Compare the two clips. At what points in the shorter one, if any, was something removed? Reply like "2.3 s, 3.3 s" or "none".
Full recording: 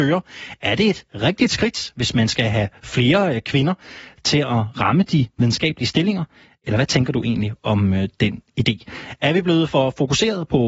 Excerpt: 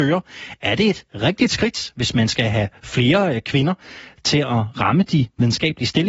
none